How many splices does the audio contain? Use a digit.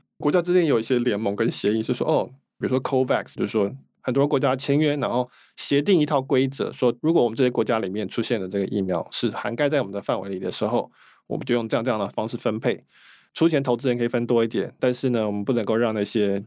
1